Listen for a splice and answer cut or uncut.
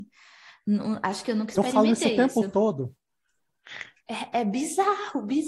cut